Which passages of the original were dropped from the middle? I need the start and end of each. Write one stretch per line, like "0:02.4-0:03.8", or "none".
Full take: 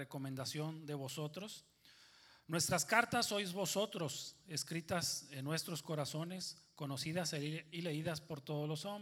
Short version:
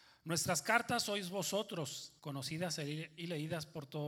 0:04.4-0:06.7